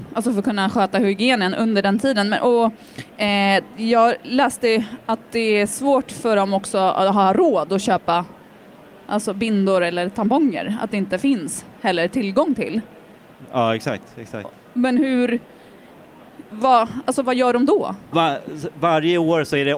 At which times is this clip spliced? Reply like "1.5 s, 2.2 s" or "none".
16.5 s, 18.1 s